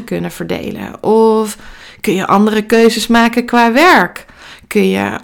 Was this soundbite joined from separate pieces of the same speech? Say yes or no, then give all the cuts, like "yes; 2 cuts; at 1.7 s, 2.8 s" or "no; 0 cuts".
no; 0 cuts